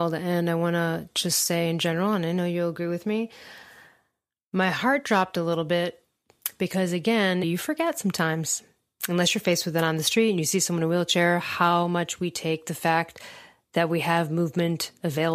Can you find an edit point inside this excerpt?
yes; 1 cut; at 7.4 s

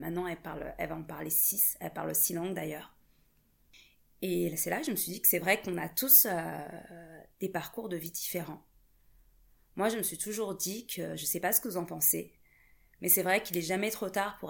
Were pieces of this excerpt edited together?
no; 0 cuts

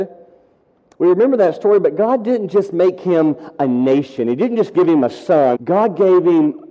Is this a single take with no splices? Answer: no; 1 cut; at 5.5 s

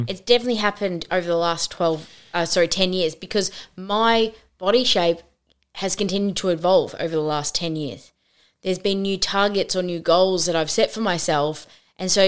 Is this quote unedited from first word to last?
yes; 0 cuts

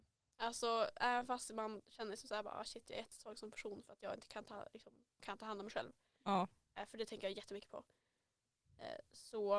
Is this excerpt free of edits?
no; 1 cut; at 5.2 s

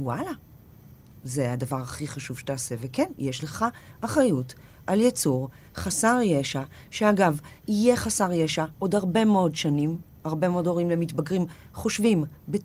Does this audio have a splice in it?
no; 0 cuts

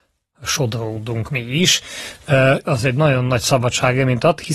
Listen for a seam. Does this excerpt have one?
yes; 1 cut; at 2.6 s

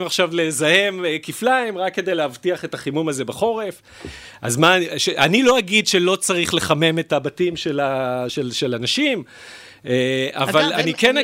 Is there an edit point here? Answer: no; 0 cuts

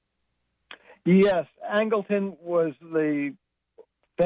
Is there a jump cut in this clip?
no; 0 cuts

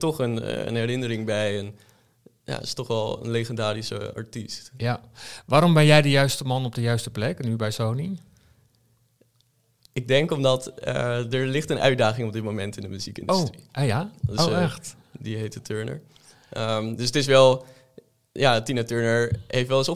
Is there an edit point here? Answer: yes; 1 cut; at 14.2 s

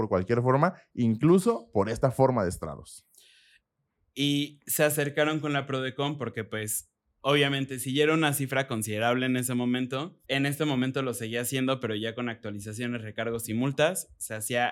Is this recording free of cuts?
no; 1 cut; at 10.2 s

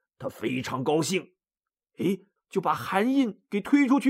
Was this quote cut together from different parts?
yes; 1 cut; at 2.4 s

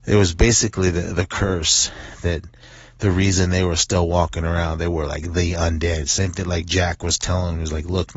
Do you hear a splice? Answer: no; 0 cuts

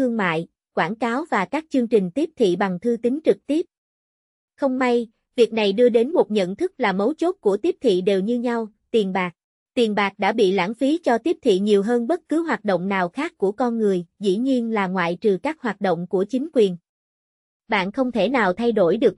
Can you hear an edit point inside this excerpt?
yes; 1 cut; at 9.6 s

